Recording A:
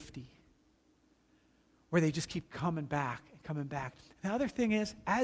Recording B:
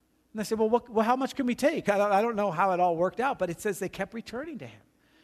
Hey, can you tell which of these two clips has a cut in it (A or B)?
B